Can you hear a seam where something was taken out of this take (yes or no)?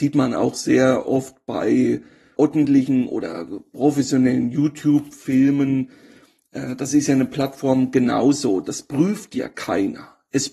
yes